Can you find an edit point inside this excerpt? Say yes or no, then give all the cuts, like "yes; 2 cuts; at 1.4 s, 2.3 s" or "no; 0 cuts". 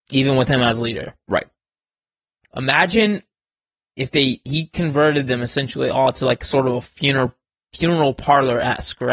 no; 0 cuts